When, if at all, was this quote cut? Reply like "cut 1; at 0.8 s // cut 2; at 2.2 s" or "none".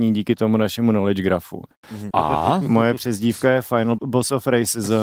cut 1; at 2.1 s // cut 2; at 4.0 s